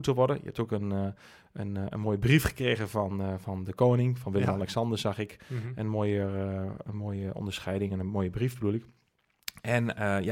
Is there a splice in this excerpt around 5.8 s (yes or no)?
no